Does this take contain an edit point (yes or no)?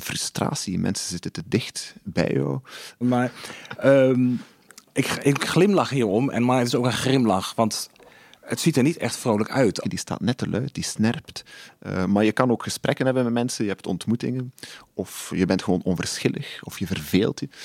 yes